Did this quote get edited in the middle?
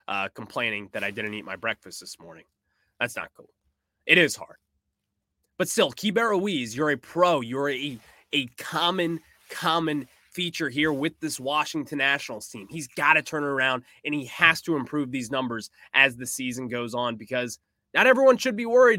no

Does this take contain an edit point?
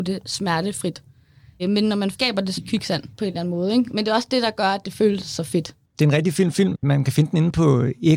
yes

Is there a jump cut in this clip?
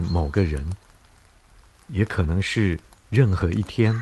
no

